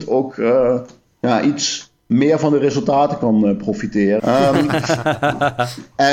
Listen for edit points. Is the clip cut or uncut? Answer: cut